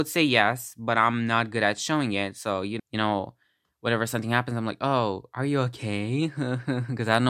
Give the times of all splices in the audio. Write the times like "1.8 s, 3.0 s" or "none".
2.8 s